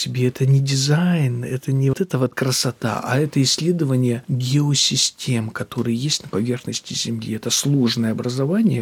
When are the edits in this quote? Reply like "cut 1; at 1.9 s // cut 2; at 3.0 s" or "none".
cut 1; at 1.9 s

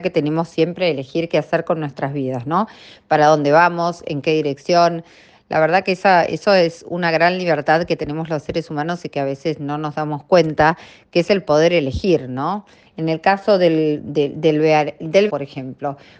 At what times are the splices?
cut 1; at 12.9 s // cut 2; at 15.3 s

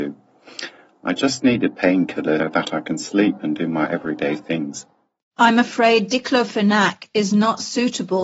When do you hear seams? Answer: cut 1; at 2.4 s

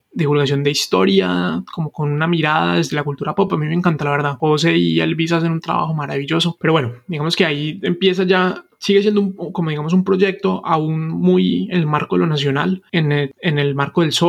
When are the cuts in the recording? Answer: none

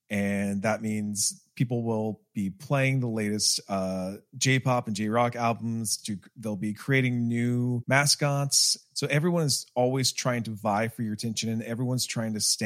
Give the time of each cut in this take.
none

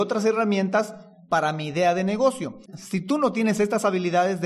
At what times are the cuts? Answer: cut 1; at 2.7 s

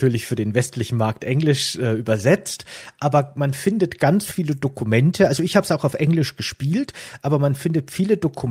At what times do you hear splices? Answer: none

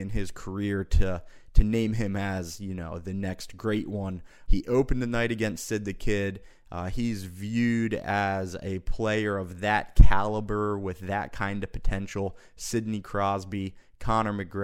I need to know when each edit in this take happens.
cut 1; at 4.5 s

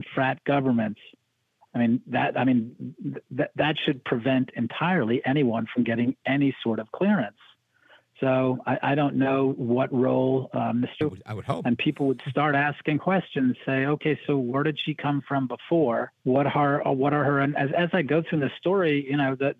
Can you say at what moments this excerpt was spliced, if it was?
cut 1; at 11.0 s // cut 2; at 16.2 s

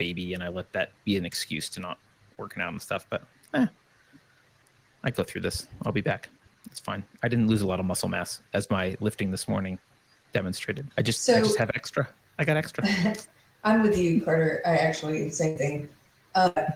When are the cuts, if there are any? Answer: cut 1; at 10.9 s

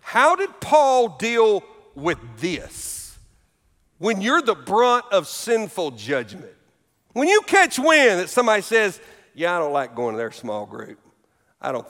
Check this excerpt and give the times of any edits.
none

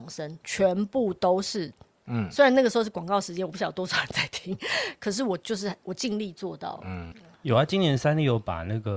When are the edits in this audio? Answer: cut 1; at 2.0 s // cut 2; at 7.1 s

